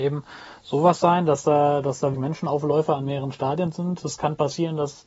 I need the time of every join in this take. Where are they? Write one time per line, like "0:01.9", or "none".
0:02.1